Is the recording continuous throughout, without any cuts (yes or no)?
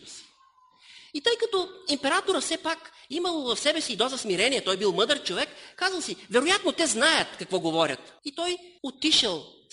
yes